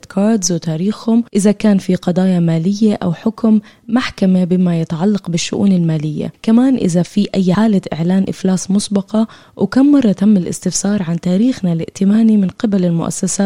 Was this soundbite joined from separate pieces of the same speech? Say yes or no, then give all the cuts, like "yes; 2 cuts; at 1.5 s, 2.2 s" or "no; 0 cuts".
yes; 1 cut; at 7.5 s